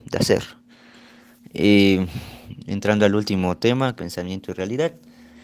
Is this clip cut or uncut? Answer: cut